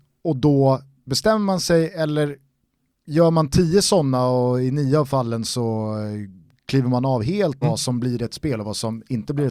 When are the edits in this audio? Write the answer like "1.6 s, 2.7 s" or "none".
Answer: 7.6 s

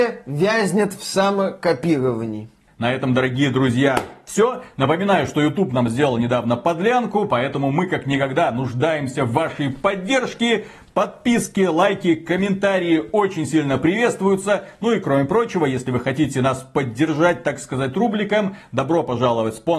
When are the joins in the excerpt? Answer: none

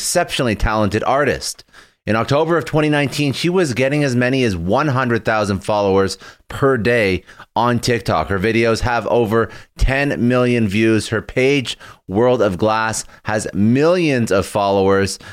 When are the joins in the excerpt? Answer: none

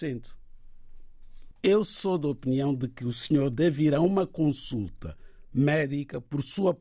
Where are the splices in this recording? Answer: 1.5 s

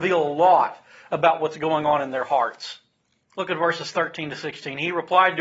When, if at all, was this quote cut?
none

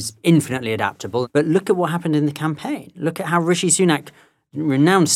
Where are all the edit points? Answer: none

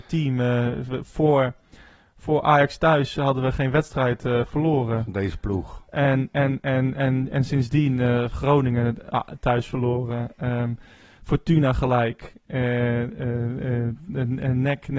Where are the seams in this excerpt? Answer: none

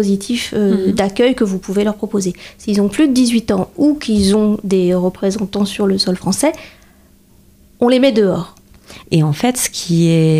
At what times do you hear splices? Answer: 9.0 s

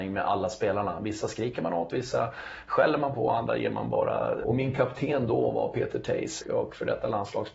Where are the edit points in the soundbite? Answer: 1.9 s, 4.4 s, 6.4 s

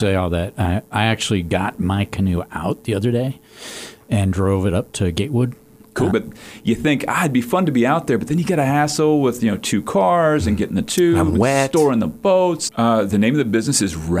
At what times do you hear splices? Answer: 6.1 s, 12.7 s

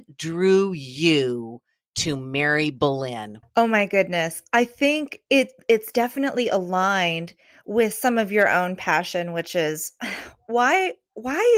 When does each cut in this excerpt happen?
3.4 s

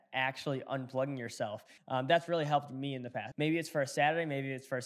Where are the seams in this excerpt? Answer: 1.8 s, 3.3 s

